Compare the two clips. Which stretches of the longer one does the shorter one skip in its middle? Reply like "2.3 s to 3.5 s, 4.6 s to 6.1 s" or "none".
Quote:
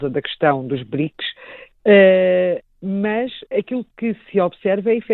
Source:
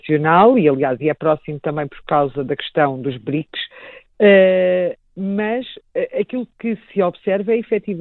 5.9 s to 6.1 s